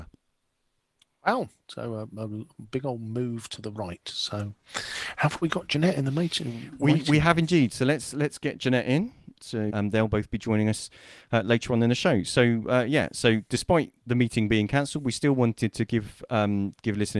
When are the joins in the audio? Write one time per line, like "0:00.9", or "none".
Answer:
0:09.7